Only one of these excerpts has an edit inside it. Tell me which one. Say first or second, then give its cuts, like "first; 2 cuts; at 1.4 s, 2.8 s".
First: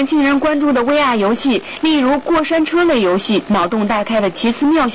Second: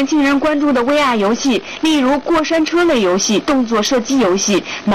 first; 1 cut; at 3.5 s